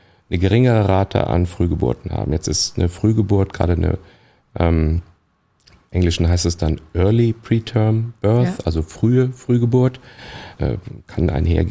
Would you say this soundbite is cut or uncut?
cut